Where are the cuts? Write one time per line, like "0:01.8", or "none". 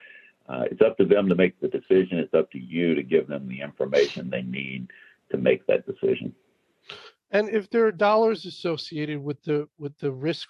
none